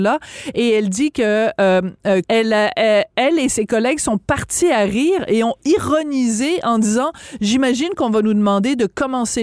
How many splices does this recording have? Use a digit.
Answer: 1